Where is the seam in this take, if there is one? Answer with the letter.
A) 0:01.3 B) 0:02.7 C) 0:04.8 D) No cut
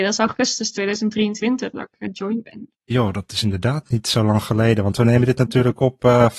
B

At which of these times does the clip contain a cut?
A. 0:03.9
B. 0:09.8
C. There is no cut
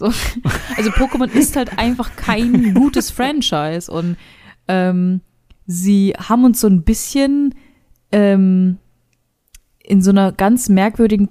C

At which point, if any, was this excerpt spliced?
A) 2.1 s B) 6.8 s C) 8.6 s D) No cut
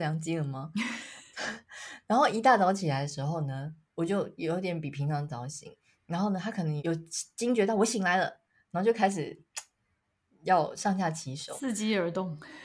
B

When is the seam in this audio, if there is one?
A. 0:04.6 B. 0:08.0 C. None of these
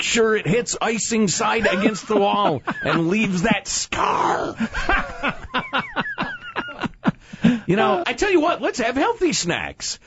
B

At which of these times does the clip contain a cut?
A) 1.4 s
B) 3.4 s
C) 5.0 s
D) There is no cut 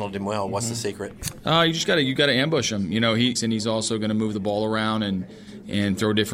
B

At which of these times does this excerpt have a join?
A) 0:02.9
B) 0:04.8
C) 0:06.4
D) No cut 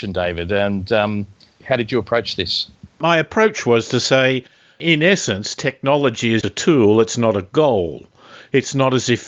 C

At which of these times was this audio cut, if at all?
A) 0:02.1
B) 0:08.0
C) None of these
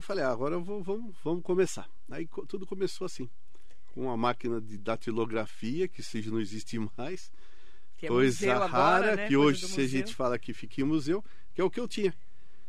C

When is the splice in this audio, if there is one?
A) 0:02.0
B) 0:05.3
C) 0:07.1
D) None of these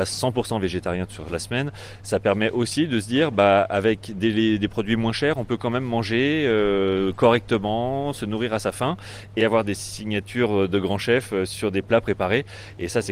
D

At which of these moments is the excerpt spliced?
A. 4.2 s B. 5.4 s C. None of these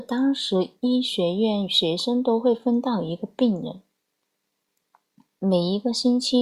C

